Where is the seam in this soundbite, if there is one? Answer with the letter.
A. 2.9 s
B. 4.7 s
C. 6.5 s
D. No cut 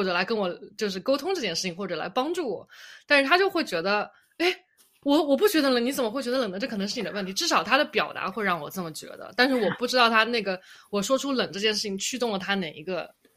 D